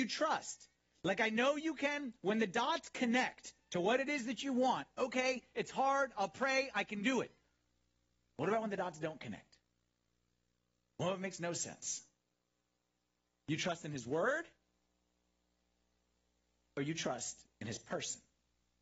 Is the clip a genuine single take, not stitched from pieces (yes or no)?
yes